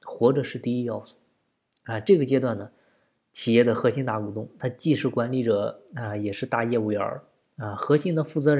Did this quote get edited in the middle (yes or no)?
no